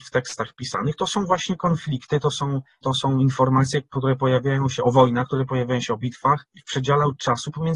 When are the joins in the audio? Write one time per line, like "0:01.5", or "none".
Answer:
0:02.8